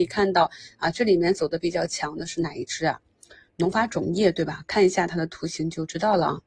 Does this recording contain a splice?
no; 0 cuts

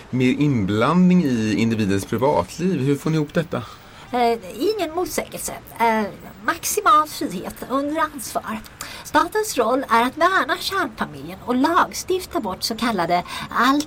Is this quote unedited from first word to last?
yes; 0 cuts

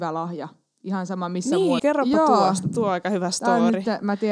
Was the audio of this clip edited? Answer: yes; 1 cut; at 1.8 s

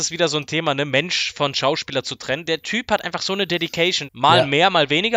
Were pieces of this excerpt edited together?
yes; 1 cut; at 4.1 s

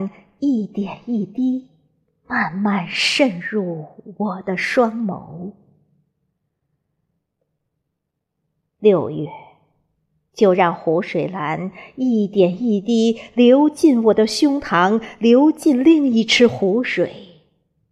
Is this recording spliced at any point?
no; 0 cuts

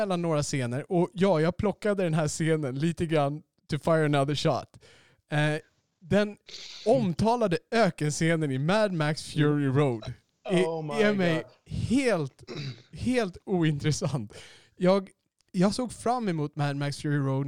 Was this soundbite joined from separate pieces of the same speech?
no; 0 cuts

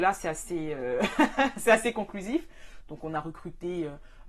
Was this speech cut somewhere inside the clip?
yes; 1 cut; at 2.8 s

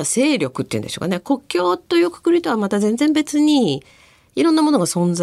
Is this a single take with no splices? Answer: yes; 0 cuts

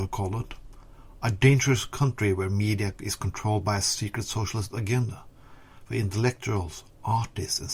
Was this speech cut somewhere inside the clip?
no; 0 cuts

